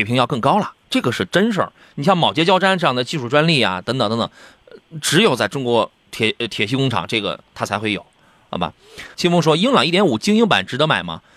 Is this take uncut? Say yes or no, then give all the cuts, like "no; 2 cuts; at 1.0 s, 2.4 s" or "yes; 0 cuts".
no; 1 cut; at 9.1 s